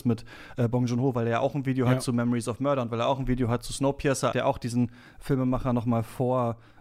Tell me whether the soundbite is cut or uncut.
cut